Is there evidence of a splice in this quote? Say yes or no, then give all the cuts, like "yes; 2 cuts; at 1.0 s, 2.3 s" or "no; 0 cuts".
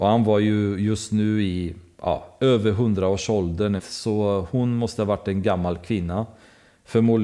yes; 1 cut; at 3.8 s